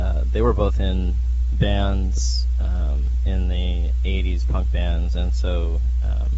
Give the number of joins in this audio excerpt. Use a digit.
0